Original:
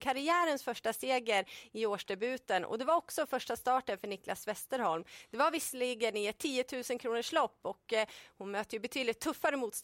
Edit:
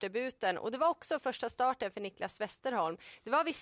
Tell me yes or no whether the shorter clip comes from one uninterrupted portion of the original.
yes